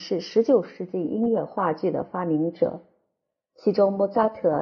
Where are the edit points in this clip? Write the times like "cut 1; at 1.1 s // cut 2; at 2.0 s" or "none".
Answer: cut 1; at 3.5 s